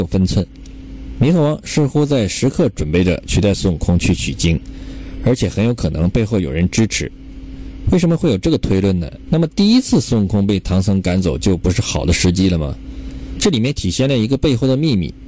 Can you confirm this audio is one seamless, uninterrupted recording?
no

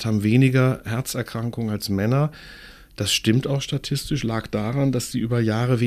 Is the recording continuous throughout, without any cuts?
yes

